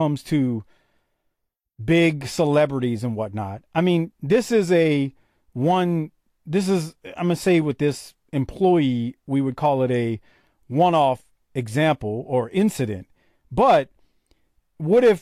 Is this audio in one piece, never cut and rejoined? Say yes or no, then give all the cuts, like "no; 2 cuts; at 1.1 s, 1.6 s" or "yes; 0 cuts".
yes; 0 cuts